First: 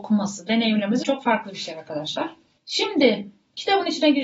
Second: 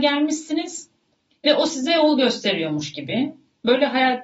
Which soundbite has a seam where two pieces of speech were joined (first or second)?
first